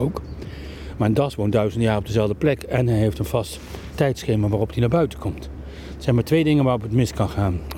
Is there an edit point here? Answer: no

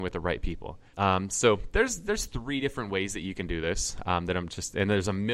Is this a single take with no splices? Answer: no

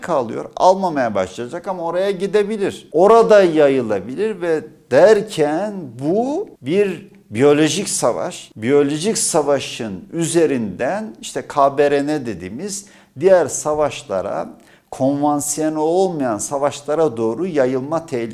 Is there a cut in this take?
no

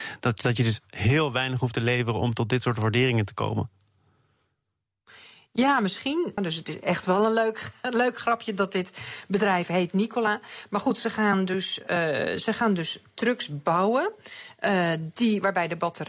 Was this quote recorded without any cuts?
no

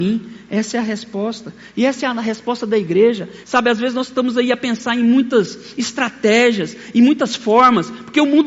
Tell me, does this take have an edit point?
yes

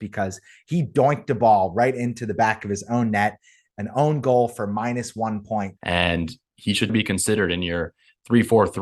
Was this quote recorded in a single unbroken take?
no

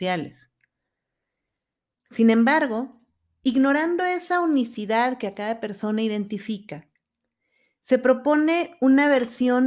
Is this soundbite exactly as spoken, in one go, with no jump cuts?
no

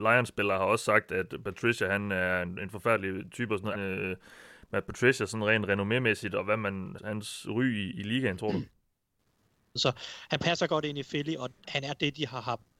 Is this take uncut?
no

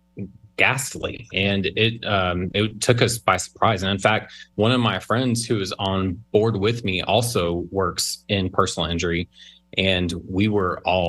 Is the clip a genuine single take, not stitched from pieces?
yes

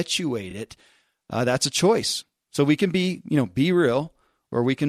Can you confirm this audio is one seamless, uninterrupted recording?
yes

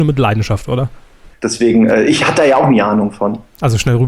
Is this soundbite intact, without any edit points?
no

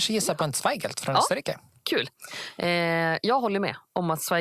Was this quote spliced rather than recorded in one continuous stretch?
no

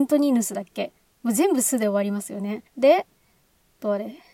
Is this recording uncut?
yes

